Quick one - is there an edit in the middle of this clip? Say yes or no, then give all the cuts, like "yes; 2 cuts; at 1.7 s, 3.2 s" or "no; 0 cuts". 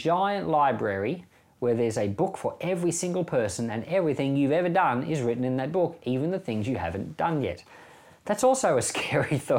no; 0 cuts